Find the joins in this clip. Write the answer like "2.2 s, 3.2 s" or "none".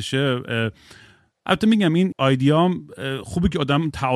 2.1 s